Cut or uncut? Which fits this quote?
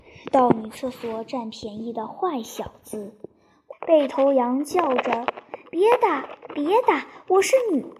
cut